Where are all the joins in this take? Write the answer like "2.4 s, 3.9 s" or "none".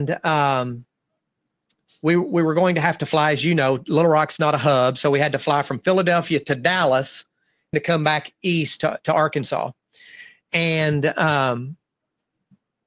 7.7 s